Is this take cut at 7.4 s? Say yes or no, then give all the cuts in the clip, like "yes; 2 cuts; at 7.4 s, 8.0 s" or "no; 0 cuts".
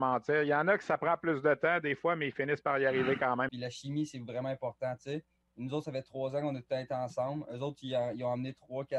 no; 1 cut; at 3.5 s